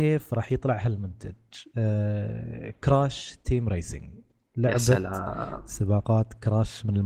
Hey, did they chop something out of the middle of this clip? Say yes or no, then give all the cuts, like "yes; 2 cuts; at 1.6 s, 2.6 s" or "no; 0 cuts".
no; 0 cuts